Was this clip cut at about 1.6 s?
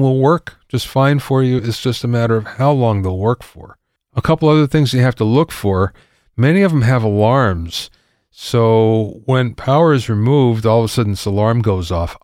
no; 0 cuts

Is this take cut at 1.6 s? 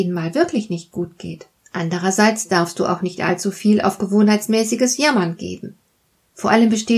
yes; 1 cut; at 1.6 s

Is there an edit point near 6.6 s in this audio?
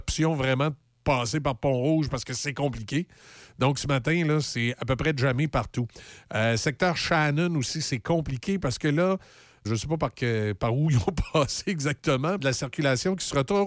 no; 2 cuts; at 9.7 s, 12.4 s

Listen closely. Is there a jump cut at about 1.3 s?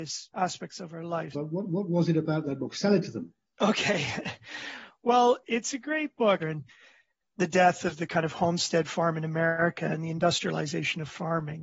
yes; 2 cuts; at 1.3 s, 6.4 s

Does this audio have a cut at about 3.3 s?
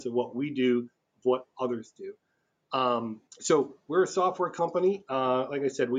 yes; 1 cut; at 3.3 s

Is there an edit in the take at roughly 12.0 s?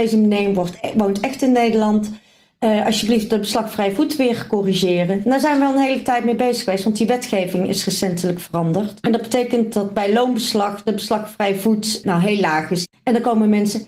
yes; 2 cuts; at 9.0 s, 12.0 s

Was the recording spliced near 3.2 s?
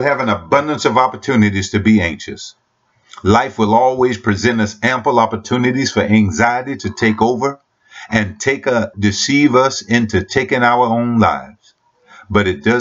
no; 1 cut; at 8.9 s

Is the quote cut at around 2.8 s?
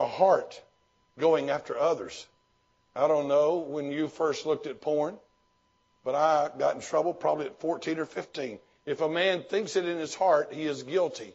no; 1 cut; at 8.8 s

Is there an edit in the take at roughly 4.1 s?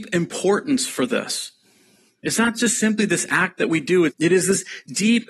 yes; 1 cut; at 4.1 s

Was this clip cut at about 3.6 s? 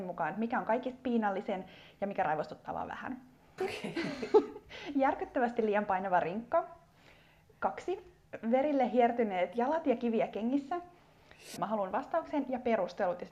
yes; 2 cuts; at 3.6 s, 11.6 s

